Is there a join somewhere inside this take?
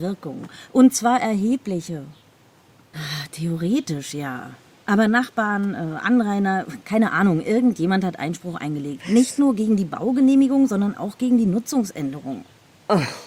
yes; 1 cut; at 2.9 s

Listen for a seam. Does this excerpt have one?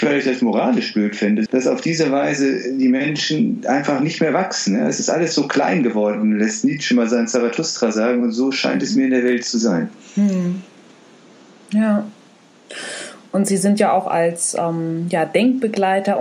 yes; 1 cut; at 1.5 s

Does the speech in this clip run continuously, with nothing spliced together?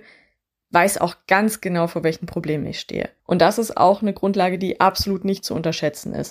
no; 1 cut; at 3.2 s

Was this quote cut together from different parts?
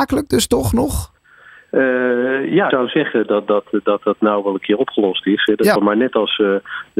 yes; 2 cuts; at 2.7 s, 5.7 s

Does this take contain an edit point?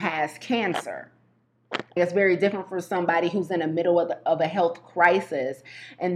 yes; 1 cut; at 2.0 s

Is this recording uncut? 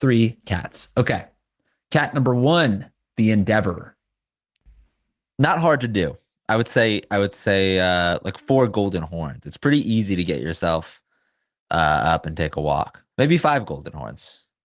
yes; 0 cuts

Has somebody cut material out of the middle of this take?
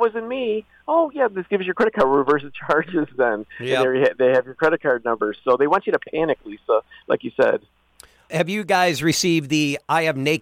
no; 0 cuts

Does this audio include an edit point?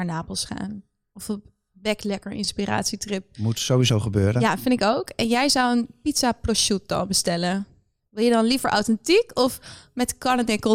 no; 0 cuts

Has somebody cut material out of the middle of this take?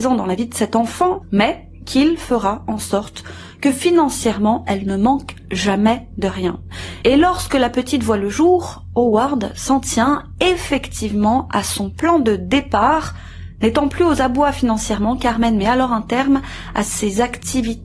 yes; 1 cut; at 7.0 s

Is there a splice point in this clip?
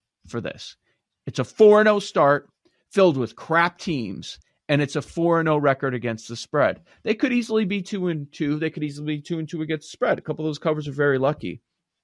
no; 0 cuts

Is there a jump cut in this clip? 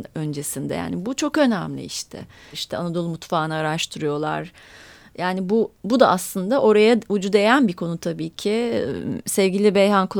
yes; 1 cut; at 2.5 s

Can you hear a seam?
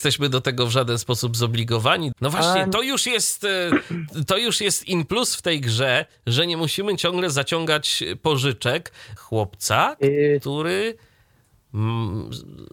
yes; 2 cuts; at 2.1 s, 9.2 s

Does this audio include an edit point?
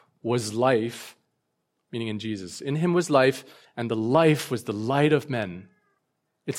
no; 0 cuts

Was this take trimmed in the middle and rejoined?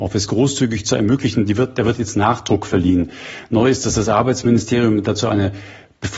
no; 0 cuts

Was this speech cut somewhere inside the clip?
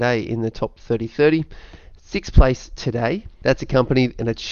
yes; 1 cut; at 3.4 s

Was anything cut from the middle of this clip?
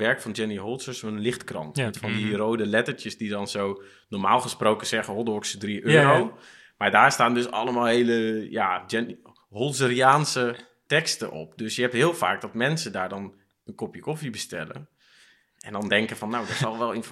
no; 0 cuts

